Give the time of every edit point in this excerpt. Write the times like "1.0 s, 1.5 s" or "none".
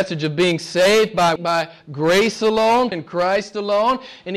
1.4 s, 2.9 s